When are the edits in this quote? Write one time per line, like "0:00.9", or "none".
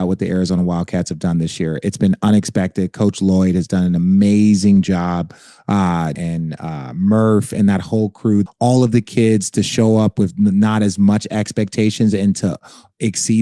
0:06.1
0:08.5